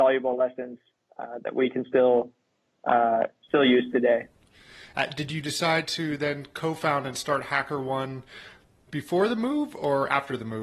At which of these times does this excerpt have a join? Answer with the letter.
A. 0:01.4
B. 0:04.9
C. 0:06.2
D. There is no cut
B